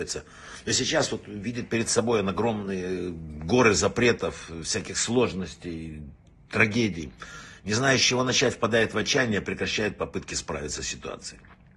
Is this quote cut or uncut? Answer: uncut